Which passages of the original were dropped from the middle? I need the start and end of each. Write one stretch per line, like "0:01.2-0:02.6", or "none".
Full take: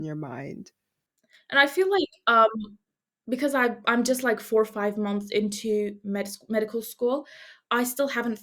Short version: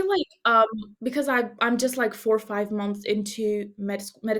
0:02.8-0:03.2